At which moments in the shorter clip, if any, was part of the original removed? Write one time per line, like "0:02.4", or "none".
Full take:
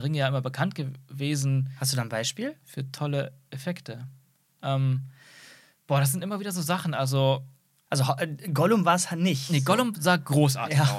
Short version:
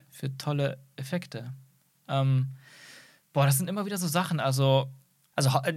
none